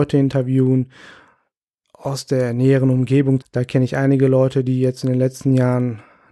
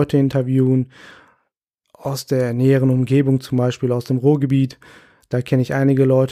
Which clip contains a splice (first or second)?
first